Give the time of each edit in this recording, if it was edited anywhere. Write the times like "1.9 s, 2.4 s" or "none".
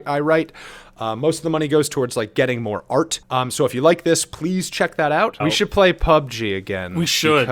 3.2 s, 5.4 s